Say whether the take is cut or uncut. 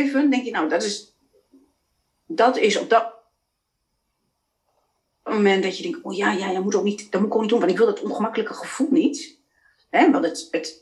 uncut